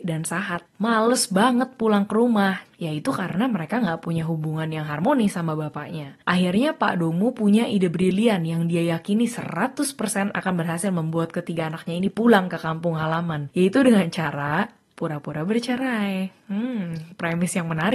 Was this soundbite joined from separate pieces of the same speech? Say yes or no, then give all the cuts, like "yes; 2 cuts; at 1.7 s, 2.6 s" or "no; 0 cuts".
no; 0 cuts